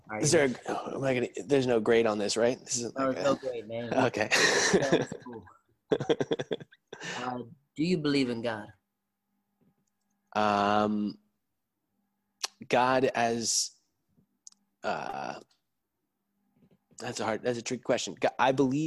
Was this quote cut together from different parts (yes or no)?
no